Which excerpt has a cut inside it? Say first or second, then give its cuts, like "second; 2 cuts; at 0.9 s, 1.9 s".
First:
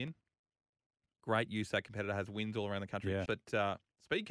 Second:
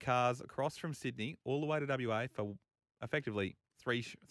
first; 1 cut; at 3.3 s